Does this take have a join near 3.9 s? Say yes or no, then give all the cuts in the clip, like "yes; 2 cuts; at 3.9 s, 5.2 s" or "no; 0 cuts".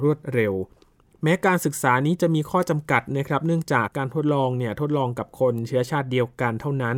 yes; 1 cut; at 3.9 s